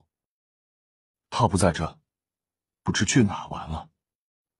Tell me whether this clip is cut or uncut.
uncut